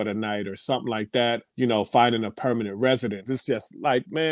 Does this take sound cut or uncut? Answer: cut